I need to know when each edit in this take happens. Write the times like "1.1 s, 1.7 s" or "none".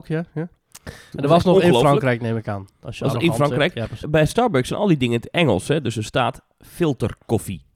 1.1 s, 4.0 s